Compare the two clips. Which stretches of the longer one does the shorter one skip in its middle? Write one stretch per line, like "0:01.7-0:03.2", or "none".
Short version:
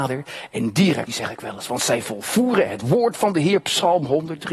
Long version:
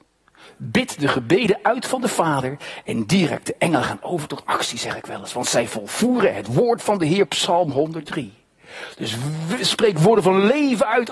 0:03.4-0:04.7